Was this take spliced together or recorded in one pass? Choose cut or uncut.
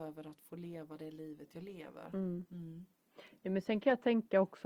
uncut